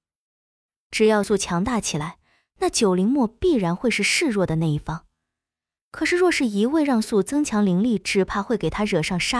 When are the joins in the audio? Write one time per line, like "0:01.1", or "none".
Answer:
0:01.2
0:07.0